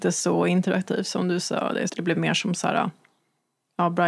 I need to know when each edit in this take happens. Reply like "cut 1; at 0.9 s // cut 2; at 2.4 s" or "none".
cut 1; at 1.9 s